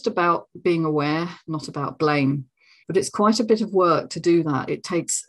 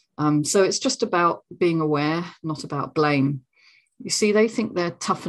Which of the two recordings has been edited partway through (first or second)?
first